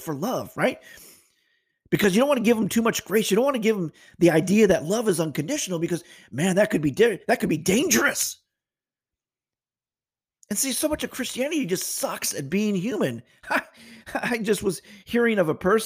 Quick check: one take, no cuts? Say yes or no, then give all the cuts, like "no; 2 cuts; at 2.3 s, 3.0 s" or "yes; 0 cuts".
yes; 0 cuts